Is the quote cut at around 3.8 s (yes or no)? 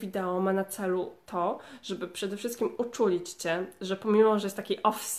no